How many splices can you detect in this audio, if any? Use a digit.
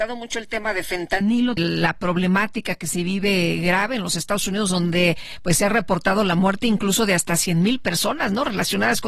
1